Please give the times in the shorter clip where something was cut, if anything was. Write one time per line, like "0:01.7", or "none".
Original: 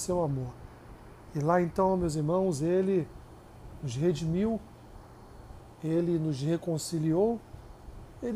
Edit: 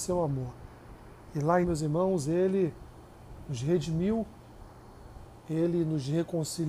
0:01.6